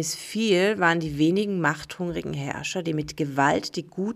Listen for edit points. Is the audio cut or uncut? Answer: uncut